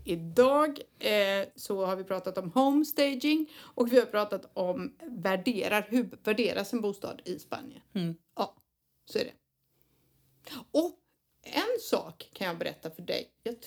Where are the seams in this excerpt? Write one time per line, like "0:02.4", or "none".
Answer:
0:01.5

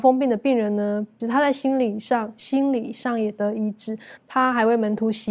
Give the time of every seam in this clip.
0:01.2
0:04.2

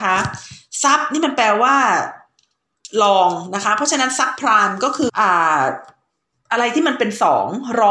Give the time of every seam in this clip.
0:05.1

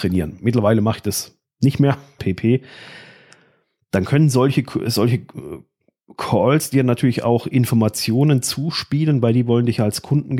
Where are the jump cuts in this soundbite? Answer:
0:02.2

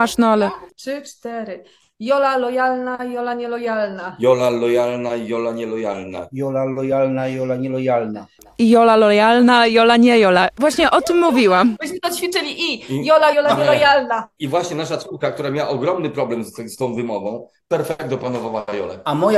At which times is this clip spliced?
0:13.3

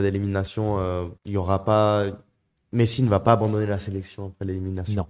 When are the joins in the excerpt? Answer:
0:01.2

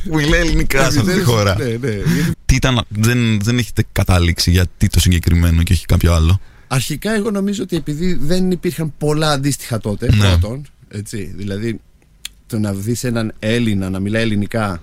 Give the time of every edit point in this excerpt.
0:02.3

